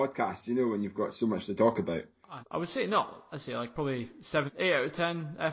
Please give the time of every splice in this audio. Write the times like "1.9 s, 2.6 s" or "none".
2.4 s, 4.5 s